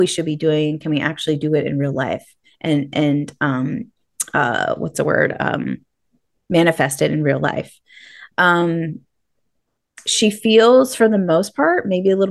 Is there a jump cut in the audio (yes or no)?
no